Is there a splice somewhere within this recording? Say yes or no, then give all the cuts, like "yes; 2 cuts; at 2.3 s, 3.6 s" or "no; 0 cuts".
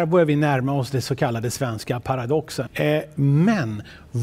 yes; 1 cut; at 2.7 s